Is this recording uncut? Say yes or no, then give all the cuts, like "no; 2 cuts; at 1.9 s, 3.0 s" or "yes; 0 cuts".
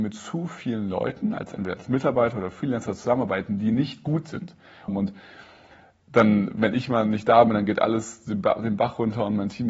no; 1 cut; at 4.9 s